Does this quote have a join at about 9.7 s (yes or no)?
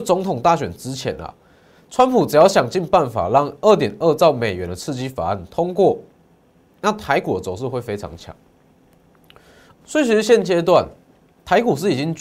yes